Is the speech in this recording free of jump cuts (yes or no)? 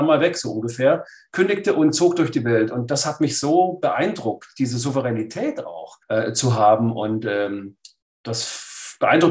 no